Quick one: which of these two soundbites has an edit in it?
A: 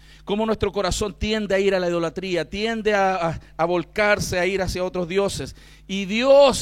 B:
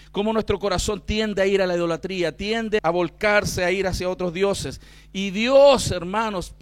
B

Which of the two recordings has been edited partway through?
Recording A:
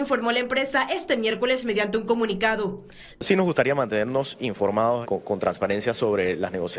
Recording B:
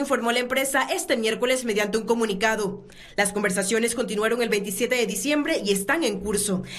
A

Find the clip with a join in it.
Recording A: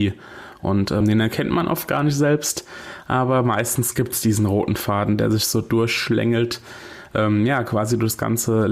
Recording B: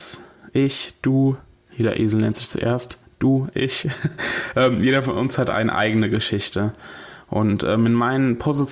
A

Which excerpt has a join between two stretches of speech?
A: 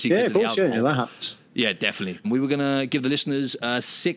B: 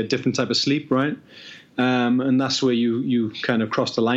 A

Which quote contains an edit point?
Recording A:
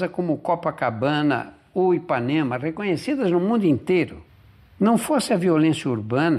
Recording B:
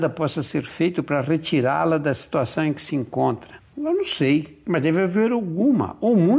B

